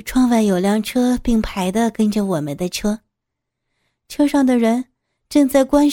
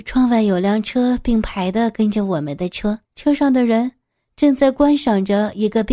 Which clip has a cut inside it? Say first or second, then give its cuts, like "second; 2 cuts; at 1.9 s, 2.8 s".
second; 1 cut; at 3.0 s